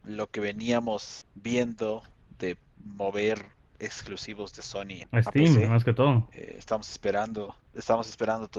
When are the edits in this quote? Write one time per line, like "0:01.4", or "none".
0:05.0